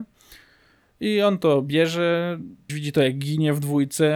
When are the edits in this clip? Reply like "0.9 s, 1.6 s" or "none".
2.7 s